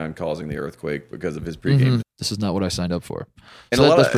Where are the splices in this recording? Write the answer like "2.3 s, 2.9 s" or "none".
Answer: 2.0 s